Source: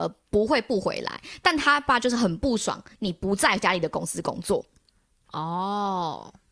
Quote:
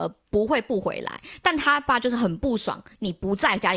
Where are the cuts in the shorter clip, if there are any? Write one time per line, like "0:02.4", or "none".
none